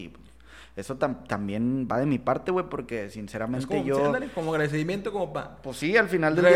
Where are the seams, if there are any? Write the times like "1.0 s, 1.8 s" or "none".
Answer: none